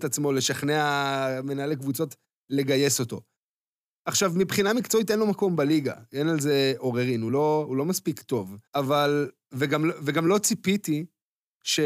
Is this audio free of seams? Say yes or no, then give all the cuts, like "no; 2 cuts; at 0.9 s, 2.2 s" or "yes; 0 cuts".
no; 1 cut; at 8.7 s